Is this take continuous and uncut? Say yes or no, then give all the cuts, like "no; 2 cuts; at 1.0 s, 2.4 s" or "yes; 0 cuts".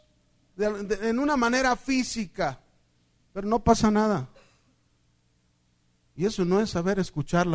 no; 1 cut; at 3.3 s